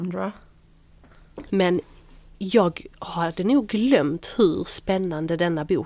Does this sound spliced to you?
yes; 1 cut; at 1.5 s

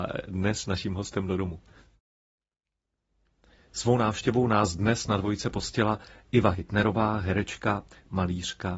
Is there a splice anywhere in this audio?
no; 0 cuts

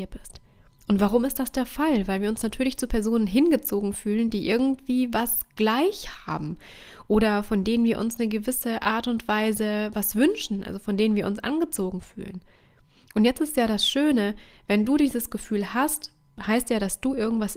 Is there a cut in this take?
no; 0 cuts

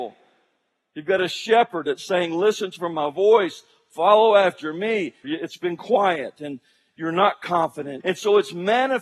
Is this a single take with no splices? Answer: no; 2 cuts; at 5.2 s, 8.0 s

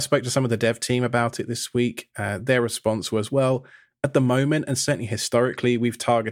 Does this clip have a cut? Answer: no; 0 cuts

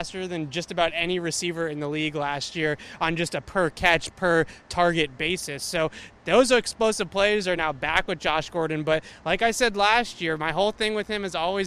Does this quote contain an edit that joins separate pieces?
no; 0 cuts

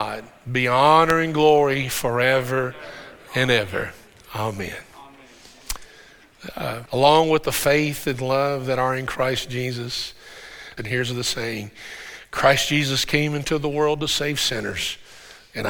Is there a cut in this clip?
yes; 2 cuts; at 6.9 s, 10.8 s

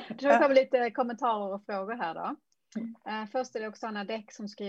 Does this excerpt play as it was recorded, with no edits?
yes; 0 cuts

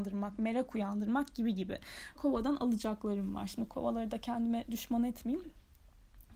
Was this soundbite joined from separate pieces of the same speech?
yes; 1 cut; at 2.1 s

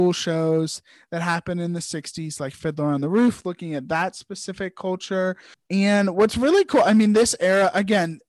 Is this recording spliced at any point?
yes; 1 cut; at 5.5 s

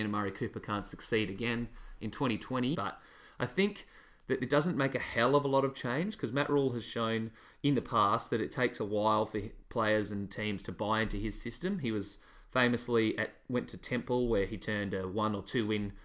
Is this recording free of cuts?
no; 1 cut; at 2.7 s

